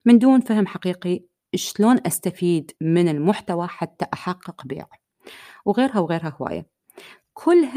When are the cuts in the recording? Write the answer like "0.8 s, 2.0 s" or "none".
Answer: 2.8 s